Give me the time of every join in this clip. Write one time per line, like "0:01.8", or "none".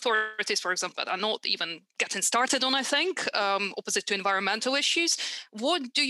0:00.9